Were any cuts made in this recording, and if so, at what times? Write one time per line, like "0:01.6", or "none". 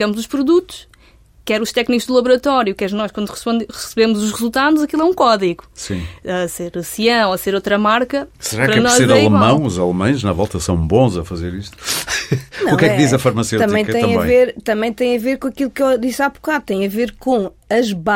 none